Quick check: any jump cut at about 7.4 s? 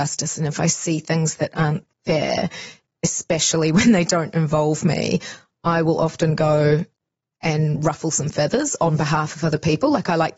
no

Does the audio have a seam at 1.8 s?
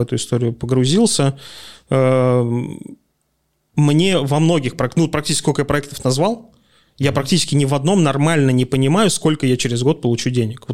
no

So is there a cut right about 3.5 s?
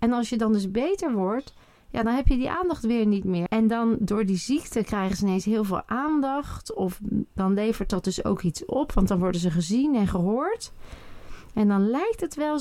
yes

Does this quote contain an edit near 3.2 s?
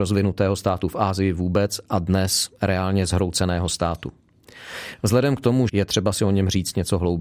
no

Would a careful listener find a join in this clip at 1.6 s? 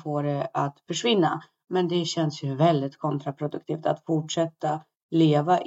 no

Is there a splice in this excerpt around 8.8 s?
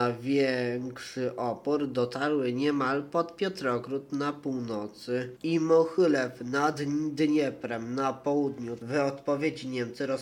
yes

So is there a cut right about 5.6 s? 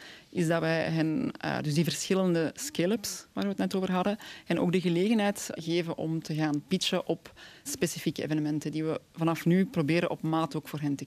yes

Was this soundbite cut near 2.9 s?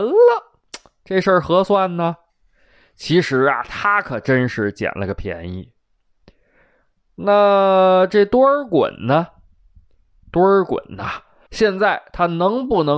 no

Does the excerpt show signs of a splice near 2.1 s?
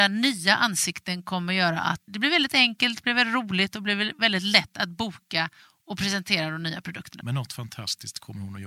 yes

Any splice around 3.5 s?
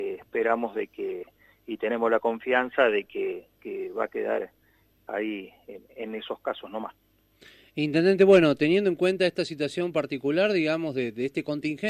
no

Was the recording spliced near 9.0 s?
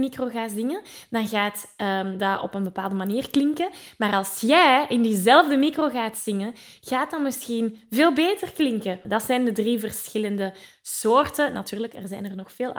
yes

